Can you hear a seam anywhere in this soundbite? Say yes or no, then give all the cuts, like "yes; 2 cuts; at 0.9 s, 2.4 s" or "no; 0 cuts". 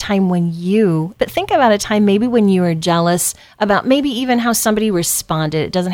yes; 1 cut; at 1.2 s